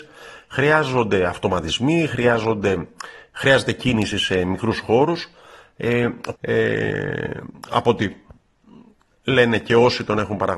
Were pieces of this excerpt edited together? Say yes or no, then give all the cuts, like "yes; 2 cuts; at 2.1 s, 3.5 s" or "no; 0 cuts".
yes; 1 cut; at 6.3 s